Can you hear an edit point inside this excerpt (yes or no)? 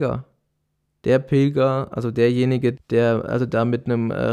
yes